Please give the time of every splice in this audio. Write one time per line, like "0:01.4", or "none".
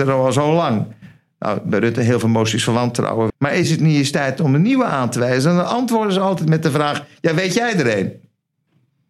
0:03.3

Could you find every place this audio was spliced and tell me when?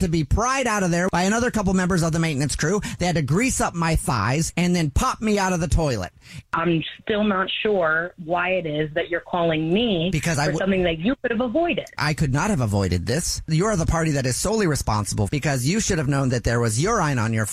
0:06.4

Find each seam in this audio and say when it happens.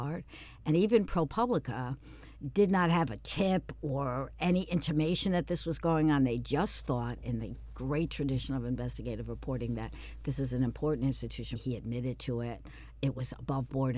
0:11.6

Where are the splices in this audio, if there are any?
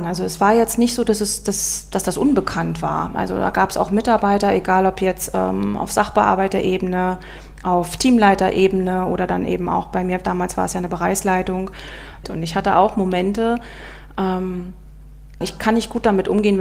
0:12.2
0:15.4

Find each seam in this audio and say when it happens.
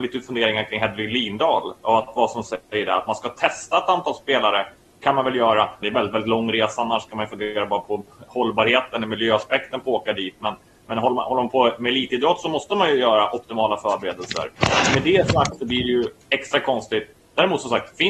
0:05.8

